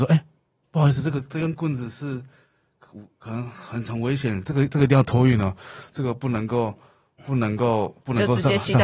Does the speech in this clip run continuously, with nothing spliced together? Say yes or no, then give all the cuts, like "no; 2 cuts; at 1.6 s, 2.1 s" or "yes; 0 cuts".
yes; 0 cuts